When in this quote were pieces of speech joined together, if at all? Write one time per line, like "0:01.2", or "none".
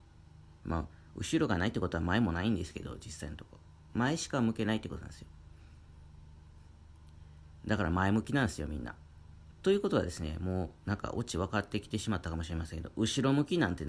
0:09.5